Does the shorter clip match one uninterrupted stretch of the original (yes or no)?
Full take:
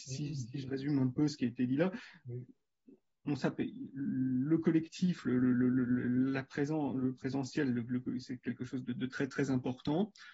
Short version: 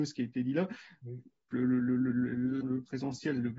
no